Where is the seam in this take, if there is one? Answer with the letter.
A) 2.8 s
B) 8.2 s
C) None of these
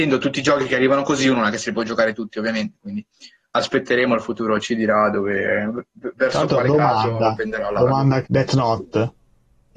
B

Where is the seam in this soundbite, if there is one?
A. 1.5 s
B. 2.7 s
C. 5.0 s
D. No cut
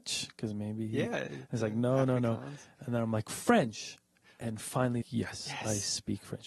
C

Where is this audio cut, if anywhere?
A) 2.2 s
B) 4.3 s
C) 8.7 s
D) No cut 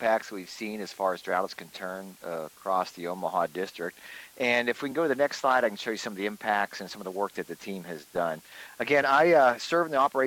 D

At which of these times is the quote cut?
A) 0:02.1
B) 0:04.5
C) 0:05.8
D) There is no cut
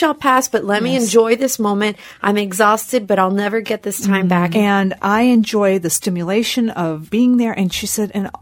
B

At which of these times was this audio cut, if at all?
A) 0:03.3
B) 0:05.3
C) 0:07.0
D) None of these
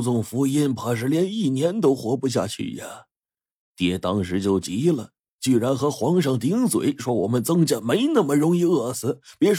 D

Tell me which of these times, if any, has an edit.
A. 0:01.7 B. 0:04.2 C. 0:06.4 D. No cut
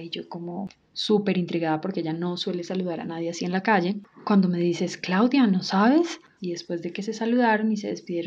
C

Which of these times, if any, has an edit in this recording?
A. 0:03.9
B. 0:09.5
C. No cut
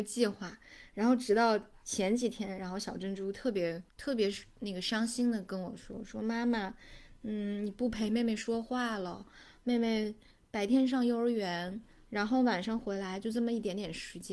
A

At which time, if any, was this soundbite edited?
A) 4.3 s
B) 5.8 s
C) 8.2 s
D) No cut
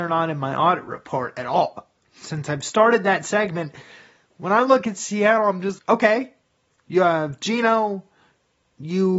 B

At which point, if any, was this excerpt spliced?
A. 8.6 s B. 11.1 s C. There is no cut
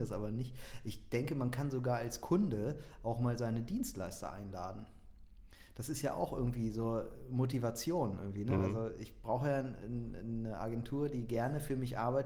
C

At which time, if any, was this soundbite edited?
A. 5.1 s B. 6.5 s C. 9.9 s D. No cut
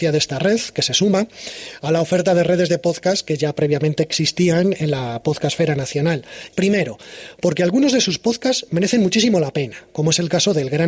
B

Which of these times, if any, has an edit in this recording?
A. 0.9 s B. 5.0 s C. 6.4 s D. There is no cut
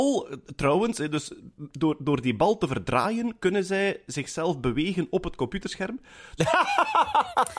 C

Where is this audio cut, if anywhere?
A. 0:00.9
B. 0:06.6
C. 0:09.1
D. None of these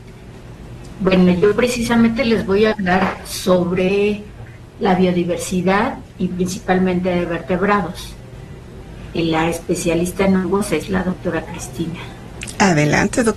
D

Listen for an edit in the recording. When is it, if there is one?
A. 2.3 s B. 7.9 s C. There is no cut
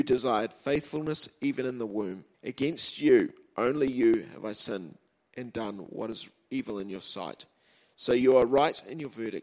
A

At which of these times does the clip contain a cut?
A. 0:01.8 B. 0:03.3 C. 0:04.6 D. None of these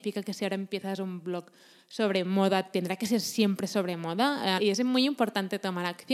C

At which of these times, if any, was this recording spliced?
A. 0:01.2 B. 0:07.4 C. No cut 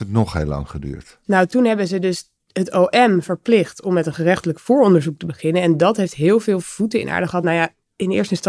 C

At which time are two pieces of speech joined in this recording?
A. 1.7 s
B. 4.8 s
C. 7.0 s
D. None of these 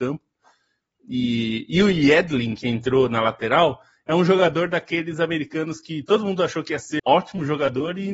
C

